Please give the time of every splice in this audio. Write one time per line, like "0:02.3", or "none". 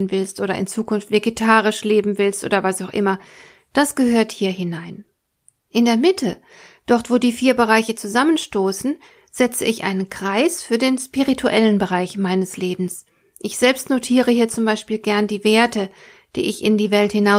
none